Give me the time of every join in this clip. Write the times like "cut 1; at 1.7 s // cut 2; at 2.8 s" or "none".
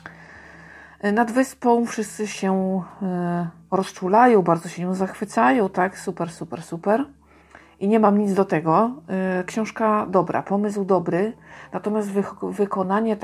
none